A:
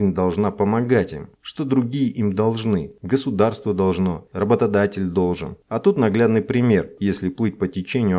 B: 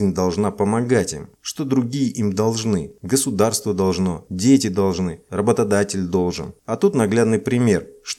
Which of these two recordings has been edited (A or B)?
A